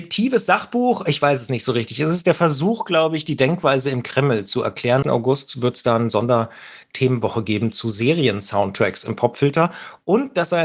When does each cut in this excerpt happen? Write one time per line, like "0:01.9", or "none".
0:05.0